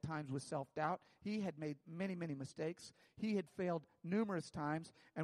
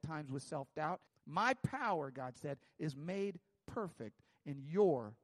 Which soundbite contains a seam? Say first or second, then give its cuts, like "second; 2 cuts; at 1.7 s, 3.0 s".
second; 1 cut; at 1.1 s